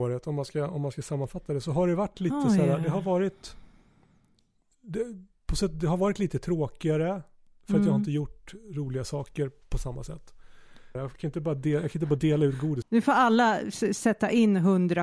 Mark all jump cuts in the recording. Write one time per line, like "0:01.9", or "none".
0:04.7
0:11.0
0:12.8